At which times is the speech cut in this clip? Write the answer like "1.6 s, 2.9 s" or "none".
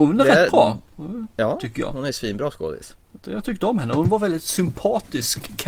1.9 s